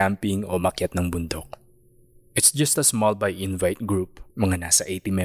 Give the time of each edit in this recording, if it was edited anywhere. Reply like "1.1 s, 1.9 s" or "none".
4.3 s